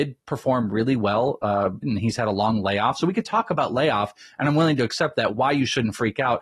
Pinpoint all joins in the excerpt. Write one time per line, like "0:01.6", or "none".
0:01.8